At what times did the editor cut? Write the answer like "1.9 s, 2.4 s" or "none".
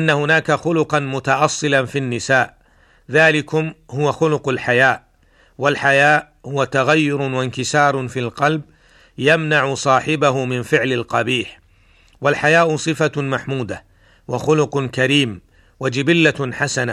none